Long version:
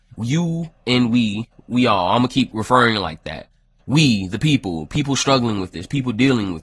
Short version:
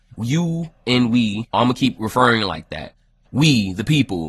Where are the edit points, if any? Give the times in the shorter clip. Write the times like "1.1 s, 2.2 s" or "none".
1.5 s